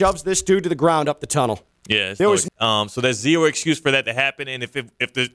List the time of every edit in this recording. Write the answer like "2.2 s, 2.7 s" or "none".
2.5 s

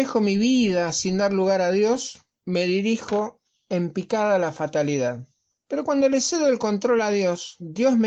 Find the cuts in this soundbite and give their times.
none

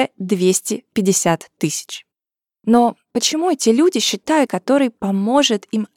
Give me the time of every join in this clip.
4.5 s

